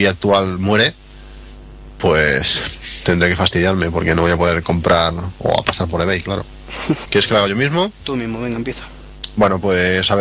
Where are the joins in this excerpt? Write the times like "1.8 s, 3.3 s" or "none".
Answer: 7.1 s